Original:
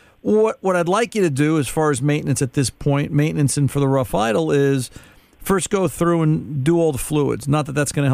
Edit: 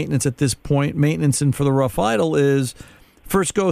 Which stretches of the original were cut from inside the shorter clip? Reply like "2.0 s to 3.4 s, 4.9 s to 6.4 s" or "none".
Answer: none